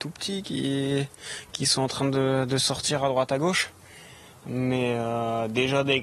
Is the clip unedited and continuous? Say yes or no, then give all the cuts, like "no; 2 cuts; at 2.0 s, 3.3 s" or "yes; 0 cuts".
yes; 0 cuts